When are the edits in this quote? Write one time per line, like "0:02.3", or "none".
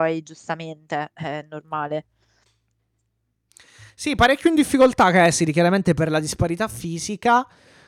none